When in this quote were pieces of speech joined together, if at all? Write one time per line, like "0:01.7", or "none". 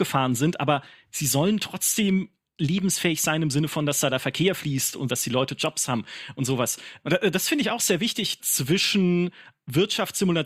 0:05.1
0:08.4